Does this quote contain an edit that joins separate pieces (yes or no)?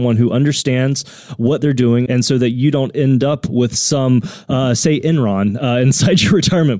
yes